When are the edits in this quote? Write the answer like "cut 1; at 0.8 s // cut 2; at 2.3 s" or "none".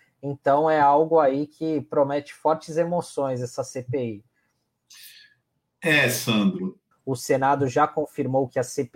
cut 1; at 6.9 s